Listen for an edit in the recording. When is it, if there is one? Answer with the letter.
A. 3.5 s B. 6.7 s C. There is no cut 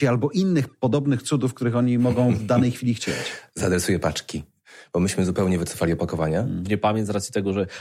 B